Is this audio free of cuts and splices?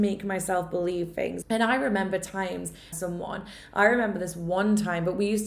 no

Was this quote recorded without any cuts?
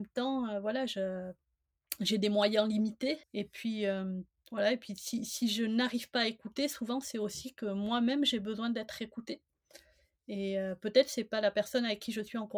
no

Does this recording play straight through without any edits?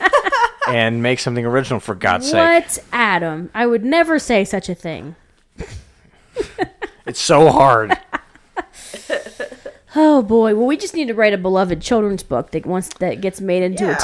yes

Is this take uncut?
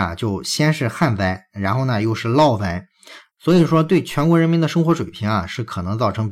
no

